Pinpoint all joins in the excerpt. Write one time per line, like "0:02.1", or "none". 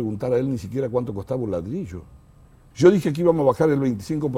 0:02.7

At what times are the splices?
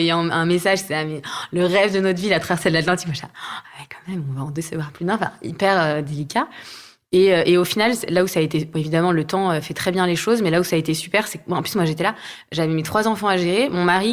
0:08.1

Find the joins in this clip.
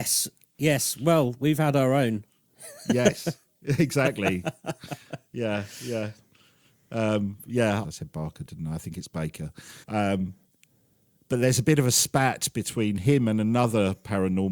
0:07.8
0:09.8

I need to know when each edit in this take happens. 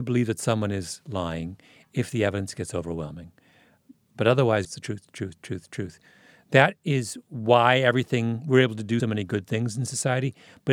0:04.6
0:09.0

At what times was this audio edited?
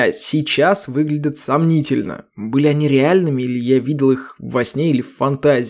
none

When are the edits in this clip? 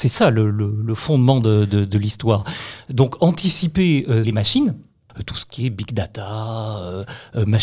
0:04.2

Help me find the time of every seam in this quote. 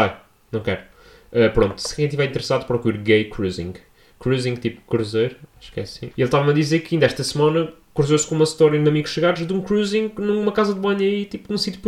0:06.1

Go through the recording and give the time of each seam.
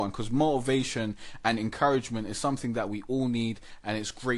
none

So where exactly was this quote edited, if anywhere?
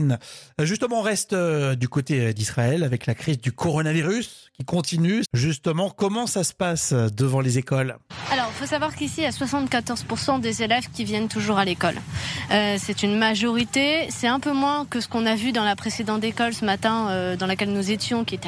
0:05.2

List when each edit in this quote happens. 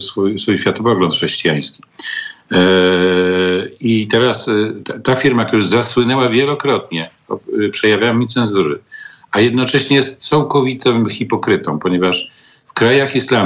none

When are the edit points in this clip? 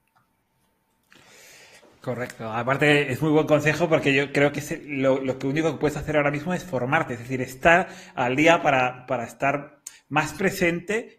none

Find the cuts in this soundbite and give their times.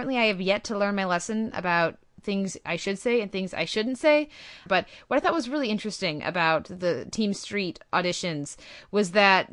0:04.7

